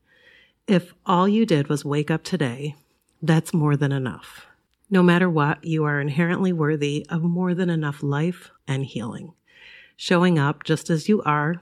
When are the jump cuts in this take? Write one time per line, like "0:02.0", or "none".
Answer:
0:08.6